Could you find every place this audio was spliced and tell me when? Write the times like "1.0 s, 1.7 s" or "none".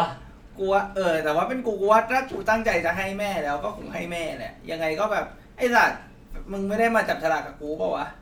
none